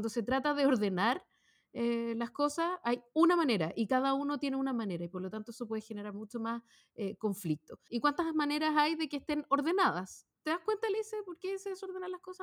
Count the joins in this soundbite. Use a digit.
2